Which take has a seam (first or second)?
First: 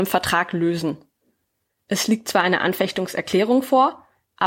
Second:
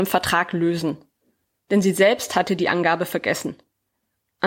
second